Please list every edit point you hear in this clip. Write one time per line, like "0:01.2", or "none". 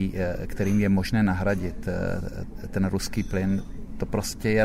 none